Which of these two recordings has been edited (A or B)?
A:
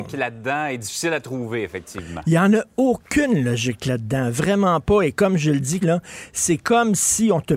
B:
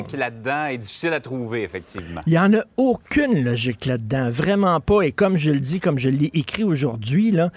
A